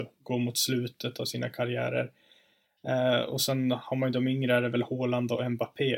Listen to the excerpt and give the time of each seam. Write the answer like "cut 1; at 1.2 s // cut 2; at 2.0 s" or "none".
none